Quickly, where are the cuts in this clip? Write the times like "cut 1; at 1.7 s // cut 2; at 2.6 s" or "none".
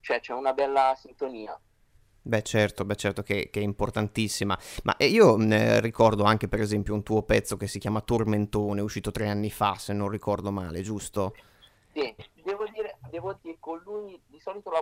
cut 1; at 12.2 s // cut 2; at 13.4 s